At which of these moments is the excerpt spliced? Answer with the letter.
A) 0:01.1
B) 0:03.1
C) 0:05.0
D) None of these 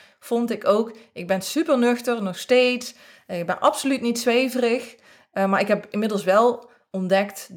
D